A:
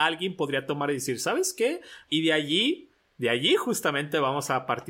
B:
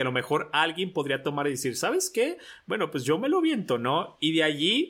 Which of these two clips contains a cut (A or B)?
A